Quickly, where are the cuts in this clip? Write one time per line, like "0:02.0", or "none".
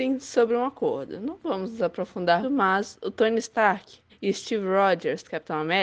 0:02.4
0:04.1